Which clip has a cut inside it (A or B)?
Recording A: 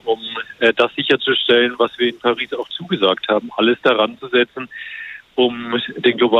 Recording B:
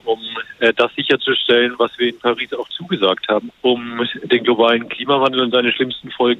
B